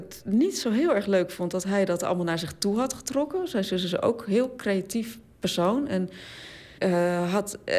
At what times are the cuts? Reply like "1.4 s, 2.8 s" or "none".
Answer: 6.8 s